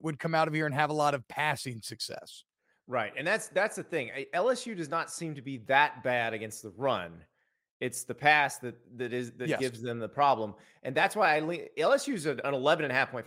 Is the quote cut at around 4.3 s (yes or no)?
no